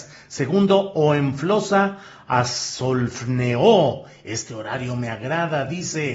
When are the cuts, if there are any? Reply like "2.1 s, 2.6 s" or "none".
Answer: none